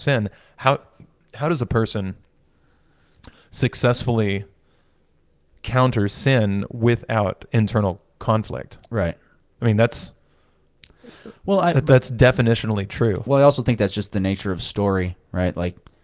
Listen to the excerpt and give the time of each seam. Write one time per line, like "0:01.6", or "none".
none